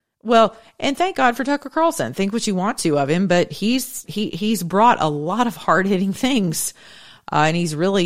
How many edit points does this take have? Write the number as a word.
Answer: one